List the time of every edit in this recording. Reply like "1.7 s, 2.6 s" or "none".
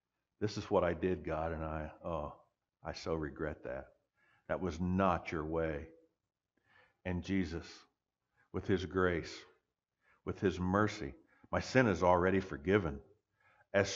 none